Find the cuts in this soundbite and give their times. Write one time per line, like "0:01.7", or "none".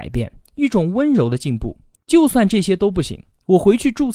0:02.0